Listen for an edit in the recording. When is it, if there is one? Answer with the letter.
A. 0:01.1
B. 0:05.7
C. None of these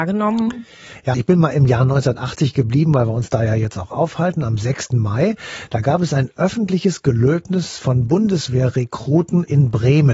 A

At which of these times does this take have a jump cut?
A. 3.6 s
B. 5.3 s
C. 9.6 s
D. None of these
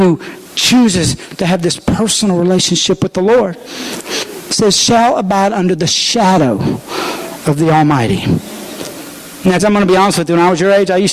C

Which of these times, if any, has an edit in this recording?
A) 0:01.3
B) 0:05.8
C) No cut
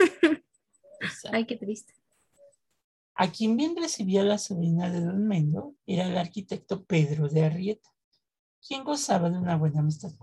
B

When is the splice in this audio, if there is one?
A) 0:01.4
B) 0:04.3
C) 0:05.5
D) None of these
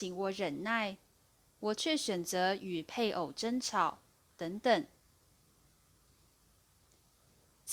B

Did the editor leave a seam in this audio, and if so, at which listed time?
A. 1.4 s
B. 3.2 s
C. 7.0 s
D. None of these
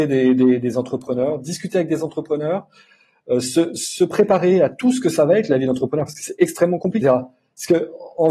C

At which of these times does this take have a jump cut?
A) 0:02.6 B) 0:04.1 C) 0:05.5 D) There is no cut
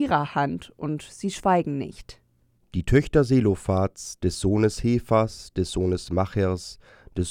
C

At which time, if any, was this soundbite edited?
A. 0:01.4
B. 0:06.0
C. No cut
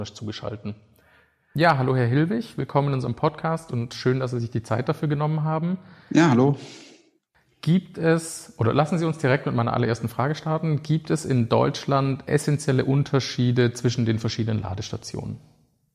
C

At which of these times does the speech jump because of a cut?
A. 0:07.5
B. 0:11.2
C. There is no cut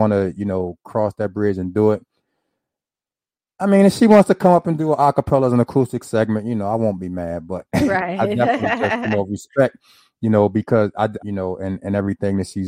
B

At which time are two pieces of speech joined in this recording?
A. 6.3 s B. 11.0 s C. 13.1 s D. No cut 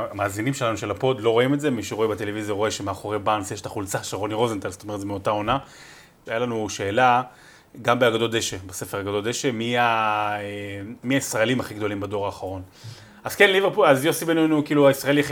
A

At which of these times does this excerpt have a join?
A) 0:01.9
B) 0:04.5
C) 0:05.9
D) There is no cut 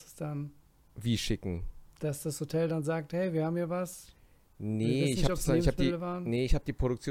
D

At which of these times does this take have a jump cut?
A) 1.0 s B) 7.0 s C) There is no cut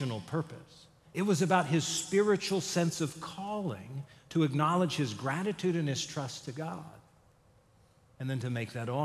A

